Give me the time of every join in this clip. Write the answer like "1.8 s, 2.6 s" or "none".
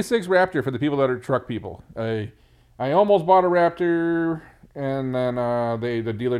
none